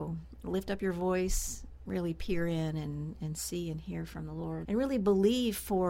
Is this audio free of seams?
no; 2 cuts; at 1.9 s, 4.6 s

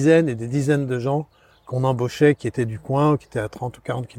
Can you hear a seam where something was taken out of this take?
no; 0 cuts

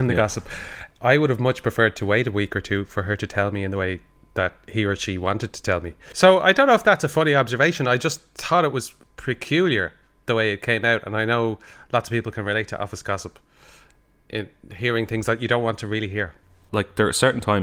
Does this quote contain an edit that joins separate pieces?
yes; 1 cut; at 16.7 s

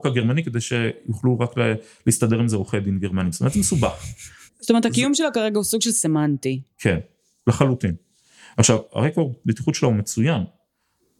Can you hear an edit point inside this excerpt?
yes; 2 cuts; at 4.5 s, 8.9 s

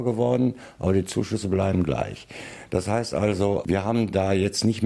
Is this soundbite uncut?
yes; 0 cuts

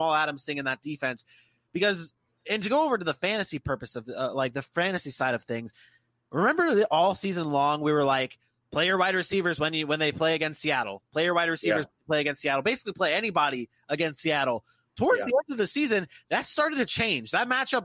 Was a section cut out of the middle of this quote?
no; 0 cuts

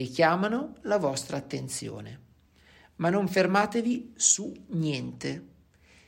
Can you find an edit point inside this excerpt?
no; 0 cuts

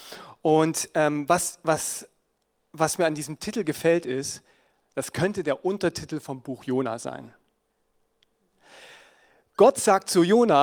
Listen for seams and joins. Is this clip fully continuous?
yes; 0 cuts

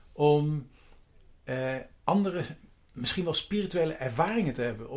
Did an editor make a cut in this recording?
no; 0 cuts

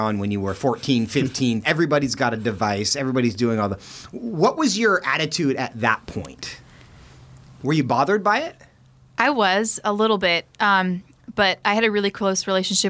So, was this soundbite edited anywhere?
yes; 1 cut; at 1.6 s

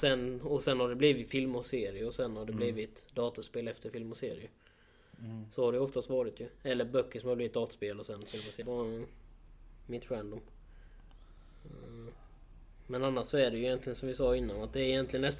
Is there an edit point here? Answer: yes; 1 cut; at 8.6 s

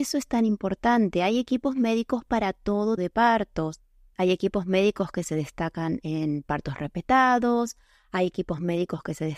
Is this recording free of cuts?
no; 1 cut; at 3.0 s

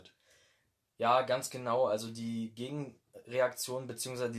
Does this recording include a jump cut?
no; 0 cuts

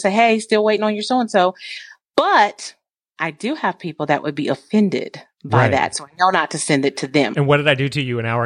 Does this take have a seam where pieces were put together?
yes; 1 cut; at 7.3 s

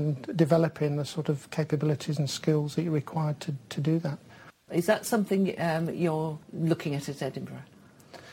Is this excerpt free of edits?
no; 2 cuts; at 4.7 s, 6.4 s

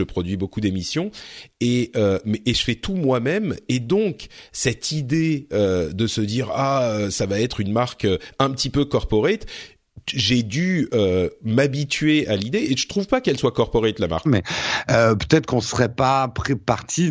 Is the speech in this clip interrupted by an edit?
yes; 1 cut; at 14.3 s

